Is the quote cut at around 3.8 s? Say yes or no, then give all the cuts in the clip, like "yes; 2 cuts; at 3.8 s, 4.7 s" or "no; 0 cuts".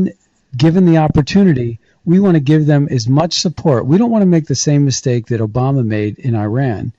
no; 0 cuts